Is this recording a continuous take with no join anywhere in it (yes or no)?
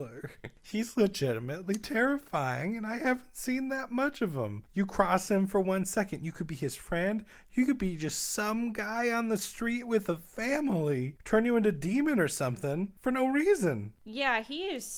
no